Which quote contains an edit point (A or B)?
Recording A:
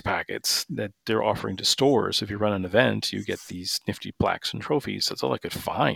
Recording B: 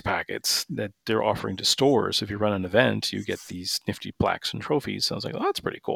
A